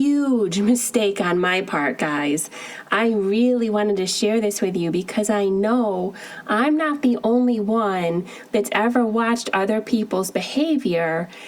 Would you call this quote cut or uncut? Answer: uncut